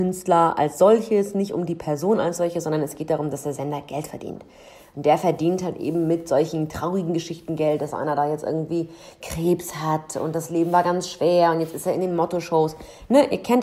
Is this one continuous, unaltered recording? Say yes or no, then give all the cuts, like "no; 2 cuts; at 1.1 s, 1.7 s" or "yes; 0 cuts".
yes; 0 cuts